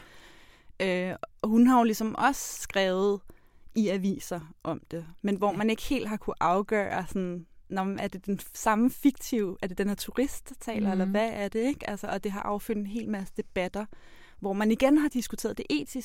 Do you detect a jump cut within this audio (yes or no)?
yes